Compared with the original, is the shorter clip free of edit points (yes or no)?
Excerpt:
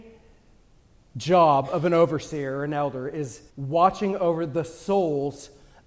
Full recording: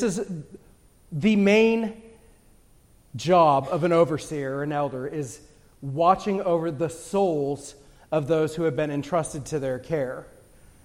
no